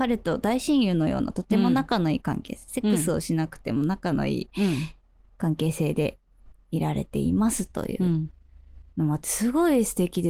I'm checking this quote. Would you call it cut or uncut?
uncut